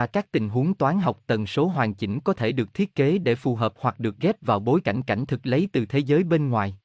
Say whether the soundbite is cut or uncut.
uncut